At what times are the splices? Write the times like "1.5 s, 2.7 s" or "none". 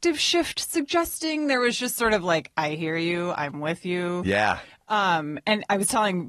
none